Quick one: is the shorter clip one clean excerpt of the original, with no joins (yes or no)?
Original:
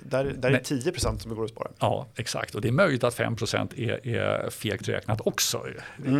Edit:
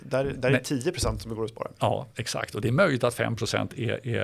yes